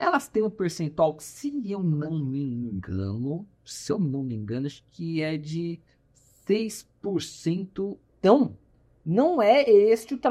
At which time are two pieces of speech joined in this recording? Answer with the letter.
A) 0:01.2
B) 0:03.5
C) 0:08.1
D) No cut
C